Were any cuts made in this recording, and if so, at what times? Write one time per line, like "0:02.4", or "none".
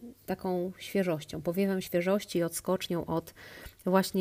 none